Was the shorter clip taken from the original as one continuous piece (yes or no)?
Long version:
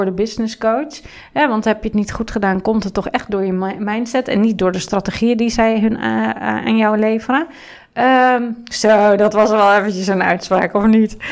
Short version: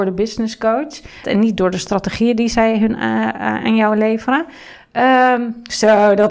no